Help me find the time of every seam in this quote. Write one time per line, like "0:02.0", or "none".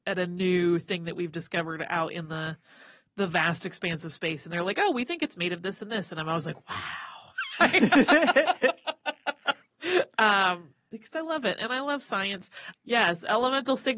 0:12.7